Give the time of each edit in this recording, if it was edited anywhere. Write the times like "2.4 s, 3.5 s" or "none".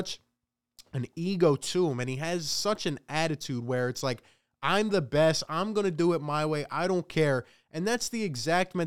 none